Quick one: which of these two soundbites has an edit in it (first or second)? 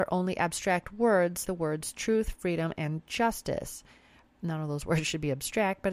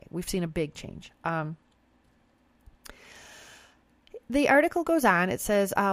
first